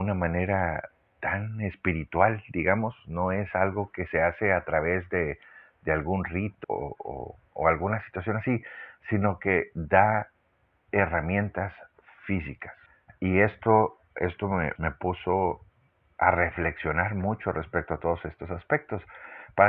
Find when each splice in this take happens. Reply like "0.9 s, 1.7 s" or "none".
6.6 s, 14.8 s